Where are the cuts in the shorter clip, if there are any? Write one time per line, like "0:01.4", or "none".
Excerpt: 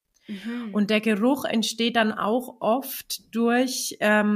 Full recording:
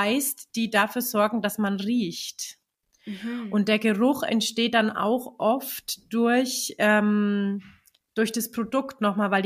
none